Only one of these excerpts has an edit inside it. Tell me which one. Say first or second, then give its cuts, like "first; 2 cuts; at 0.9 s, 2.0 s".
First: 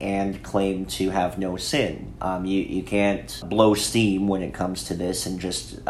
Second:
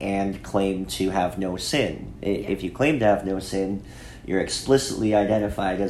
first; 2 cuts; at 2.2 s, 3.4 s